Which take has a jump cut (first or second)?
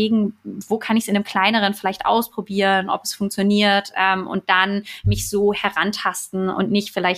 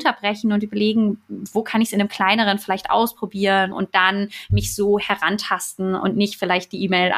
second